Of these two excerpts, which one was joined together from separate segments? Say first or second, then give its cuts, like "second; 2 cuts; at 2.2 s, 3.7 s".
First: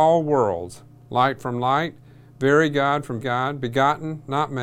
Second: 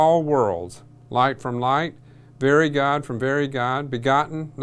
first; 1 cut; at 3.2 s